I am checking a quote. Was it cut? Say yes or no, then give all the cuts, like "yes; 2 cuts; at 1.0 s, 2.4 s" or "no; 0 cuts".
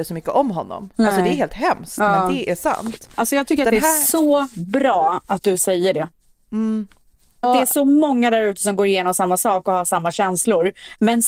yes; 1 cut; at 7.4 s